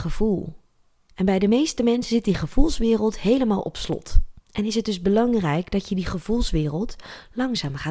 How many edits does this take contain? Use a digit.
1